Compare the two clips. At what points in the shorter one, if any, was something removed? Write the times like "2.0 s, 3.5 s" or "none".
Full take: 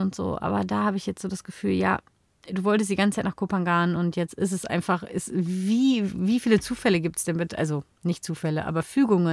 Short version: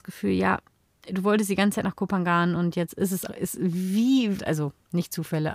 3.3 s, 4.4 s